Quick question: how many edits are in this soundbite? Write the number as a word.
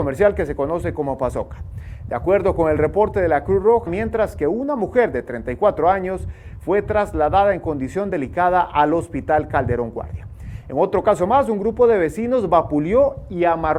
one